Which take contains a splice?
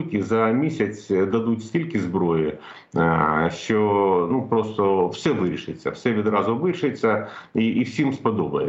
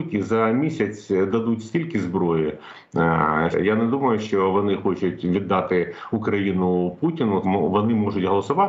second; 2 cuts; at 3.5 s, 7.4 s

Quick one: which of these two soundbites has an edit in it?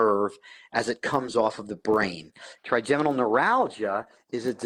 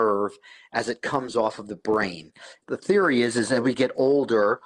first; 1 cut; at 2.6 s

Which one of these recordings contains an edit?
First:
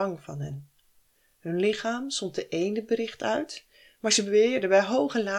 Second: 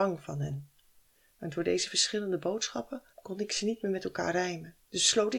second; 2 cuts; at 1.3 s, 3.1 s

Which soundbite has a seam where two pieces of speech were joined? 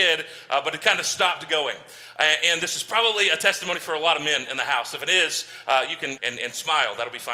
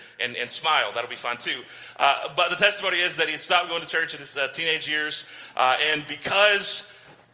first; 1 cut; at 6.2 s

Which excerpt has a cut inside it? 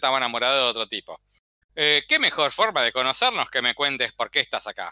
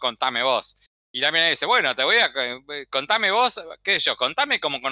first; 1 cut; at 1.6 s

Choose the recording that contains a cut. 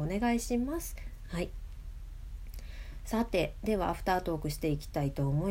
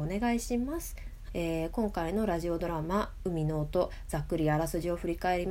second; 1 cut; at 1.3 s

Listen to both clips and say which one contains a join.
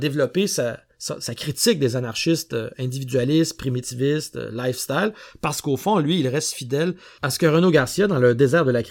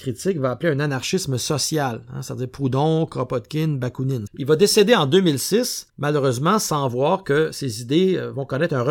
second; 2 cuts; at 4.3 s, 5.9 s

